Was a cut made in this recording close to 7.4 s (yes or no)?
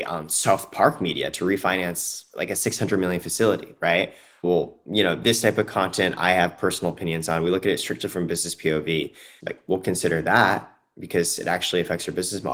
no